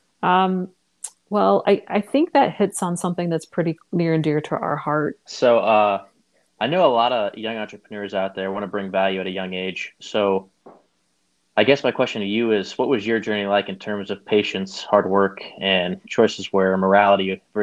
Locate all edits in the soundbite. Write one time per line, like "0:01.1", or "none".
0:05.3